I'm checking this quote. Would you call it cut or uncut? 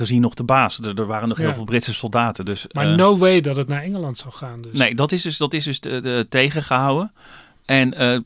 uncut